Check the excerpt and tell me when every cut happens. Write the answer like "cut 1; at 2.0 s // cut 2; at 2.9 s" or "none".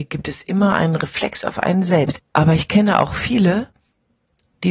cut 1; at 2.2 s